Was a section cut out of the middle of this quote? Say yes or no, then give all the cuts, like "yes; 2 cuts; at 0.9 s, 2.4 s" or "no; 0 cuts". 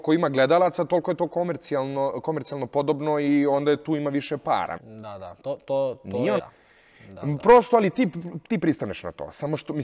yes; 2 cuts; at 4.8 s, 6.4 s